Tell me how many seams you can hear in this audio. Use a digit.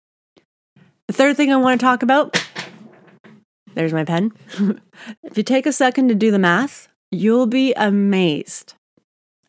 2